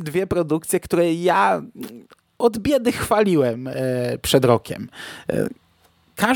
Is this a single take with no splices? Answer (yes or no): yes